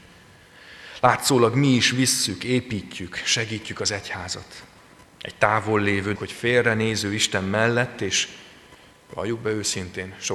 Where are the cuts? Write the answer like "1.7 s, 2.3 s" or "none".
6.2 s